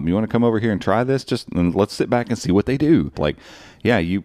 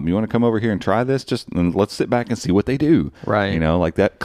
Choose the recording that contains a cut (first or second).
first